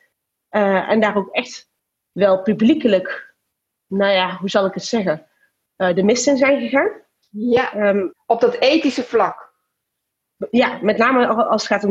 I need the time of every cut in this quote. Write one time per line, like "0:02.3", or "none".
none